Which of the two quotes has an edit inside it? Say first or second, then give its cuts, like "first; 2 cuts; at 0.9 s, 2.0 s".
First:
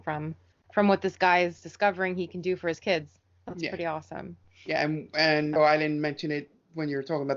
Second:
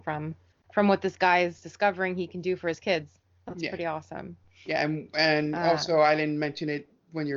first; 1 cut; at 5.6 s